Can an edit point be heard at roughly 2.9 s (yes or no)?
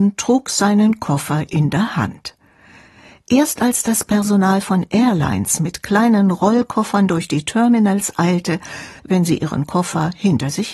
no